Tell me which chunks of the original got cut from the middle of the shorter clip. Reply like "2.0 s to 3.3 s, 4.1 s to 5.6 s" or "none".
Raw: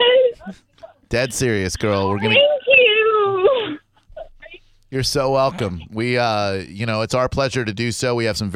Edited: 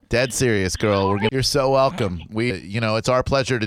2.3 s to 4.9 s, 6.1 s to 6.6 s